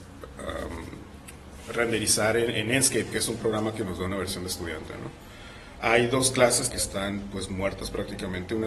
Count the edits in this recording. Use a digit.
1